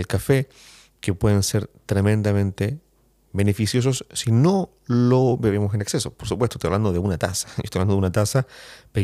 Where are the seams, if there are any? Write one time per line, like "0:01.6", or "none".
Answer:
0:03.3